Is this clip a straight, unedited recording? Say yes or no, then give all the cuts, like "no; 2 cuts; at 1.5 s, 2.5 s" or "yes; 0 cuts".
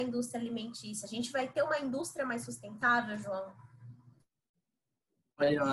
yes; 0 cuts